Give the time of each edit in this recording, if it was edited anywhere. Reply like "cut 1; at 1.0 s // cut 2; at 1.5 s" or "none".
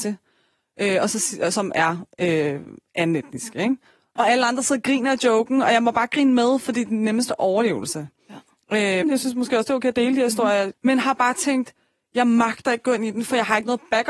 cut 1; at 4.2 s // cut 2; at 9.0 s // cut 3; at 10.7 s